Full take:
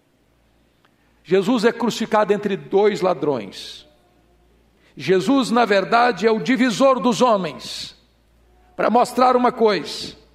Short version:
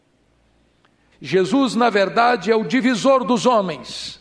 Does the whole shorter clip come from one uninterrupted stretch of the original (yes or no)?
no